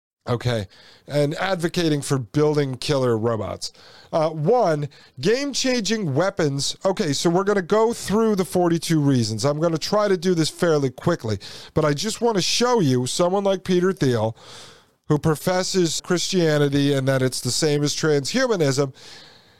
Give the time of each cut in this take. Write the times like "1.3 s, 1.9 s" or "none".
16.0 s